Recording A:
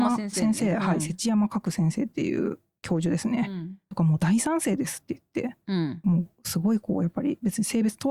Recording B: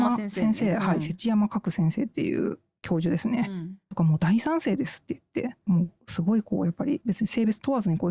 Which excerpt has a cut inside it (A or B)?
B